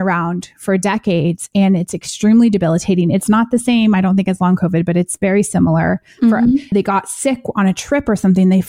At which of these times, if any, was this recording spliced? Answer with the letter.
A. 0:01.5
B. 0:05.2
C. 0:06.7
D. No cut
C